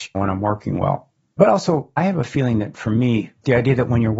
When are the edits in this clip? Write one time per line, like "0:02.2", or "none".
none